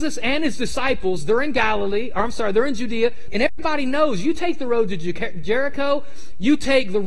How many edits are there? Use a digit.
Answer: 1